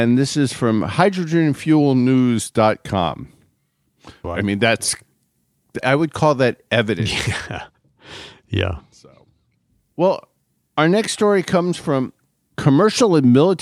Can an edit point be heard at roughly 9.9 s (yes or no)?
no